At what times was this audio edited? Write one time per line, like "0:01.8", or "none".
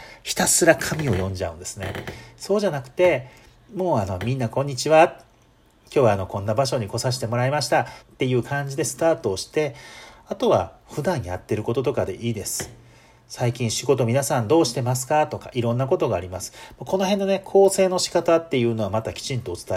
0:08.0